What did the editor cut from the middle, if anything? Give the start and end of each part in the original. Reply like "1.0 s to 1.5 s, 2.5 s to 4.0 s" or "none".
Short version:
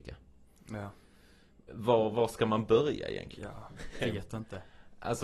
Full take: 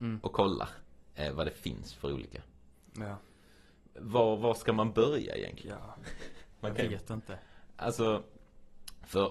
6.3 s to 6.8 s